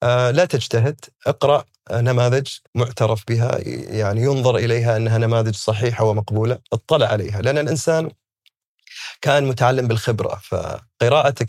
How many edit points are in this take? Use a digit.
3